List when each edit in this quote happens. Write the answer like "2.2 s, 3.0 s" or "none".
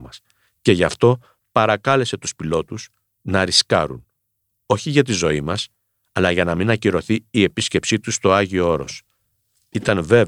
none